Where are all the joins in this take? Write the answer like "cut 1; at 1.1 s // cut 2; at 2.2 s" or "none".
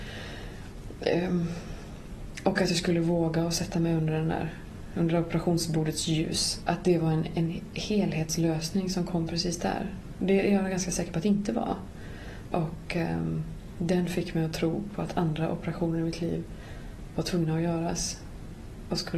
cut 1; at 6.6 s // cut 2; at 12.5 s